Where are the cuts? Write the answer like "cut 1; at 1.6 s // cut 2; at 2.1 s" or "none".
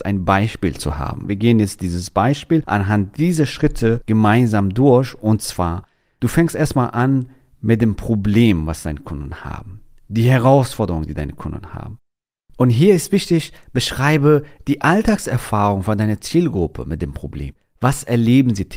cut 1; at 12.5 s